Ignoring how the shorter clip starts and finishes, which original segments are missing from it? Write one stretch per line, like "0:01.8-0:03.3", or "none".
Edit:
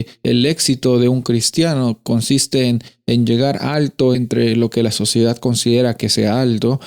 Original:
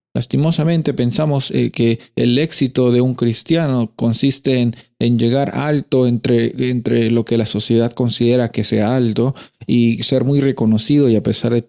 0:06.1-0:06.7